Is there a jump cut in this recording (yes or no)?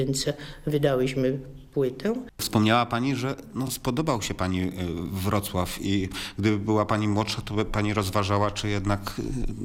no